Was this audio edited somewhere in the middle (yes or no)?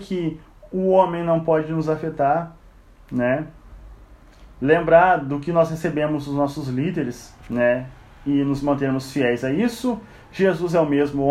yes